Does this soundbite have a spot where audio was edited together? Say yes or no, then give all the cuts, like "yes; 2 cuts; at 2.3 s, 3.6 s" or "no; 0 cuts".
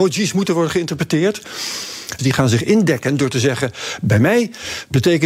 yes; 1 cut; at 2.2 s